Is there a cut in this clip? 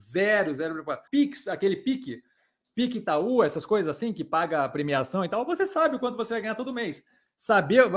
yes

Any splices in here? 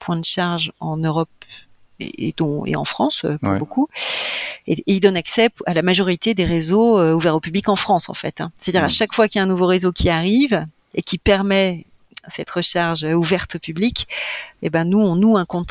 no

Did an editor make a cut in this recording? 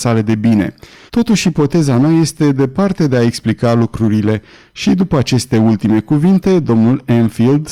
yes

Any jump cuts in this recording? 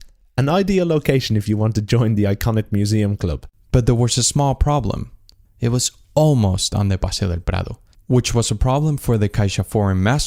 yes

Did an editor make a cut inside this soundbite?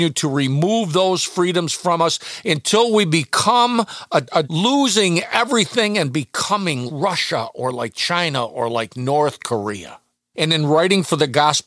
yes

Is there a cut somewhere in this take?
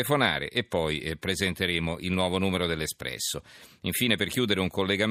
no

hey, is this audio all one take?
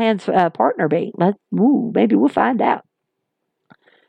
yes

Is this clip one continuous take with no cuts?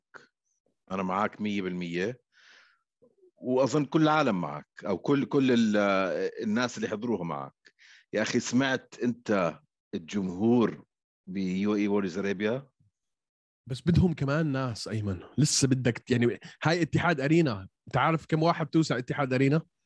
yes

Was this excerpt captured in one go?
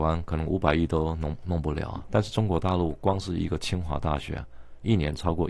no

